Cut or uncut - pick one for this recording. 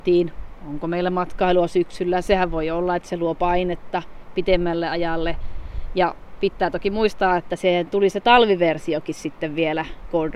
uncut